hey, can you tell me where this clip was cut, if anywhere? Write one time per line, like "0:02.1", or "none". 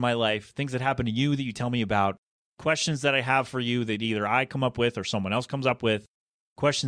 none